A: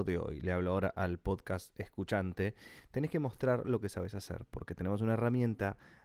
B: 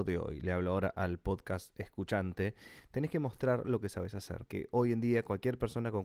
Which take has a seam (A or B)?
B